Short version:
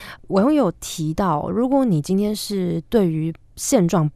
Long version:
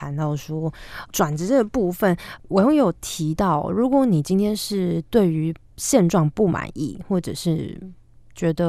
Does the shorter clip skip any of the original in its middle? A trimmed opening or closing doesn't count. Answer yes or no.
no